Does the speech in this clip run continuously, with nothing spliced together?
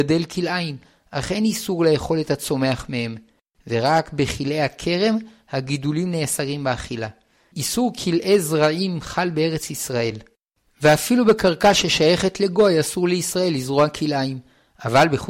yes; 0 cuts

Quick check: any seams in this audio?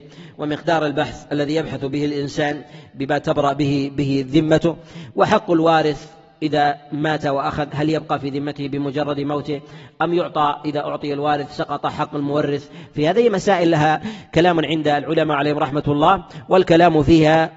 no; 0 cuts

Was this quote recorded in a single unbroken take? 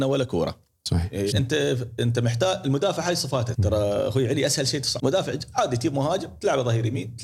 no; 3 cuts; at 1.3 s, 3.5 s, 5.0 s

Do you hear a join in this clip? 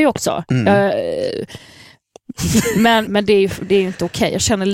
yes; 1 cut; at 3.1 s

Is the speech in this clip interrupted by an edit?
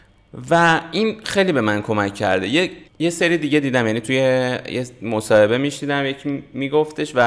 yes; 1 cut; at 2.9 s

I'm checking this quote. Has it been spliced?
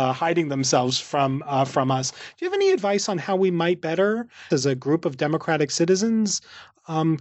yes; 1 cut; at 4.5 s

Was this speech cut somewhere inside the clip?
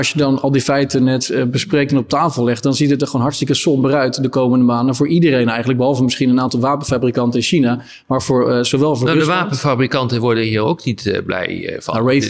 no; 0 cuts

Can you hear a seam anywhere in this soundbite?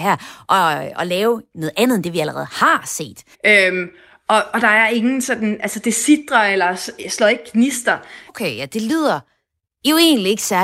yes; 2 cuts; at 3.3 s, 8.3 s

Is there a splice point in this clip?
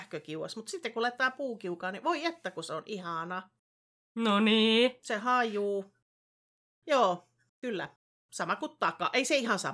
no; 0 cuts

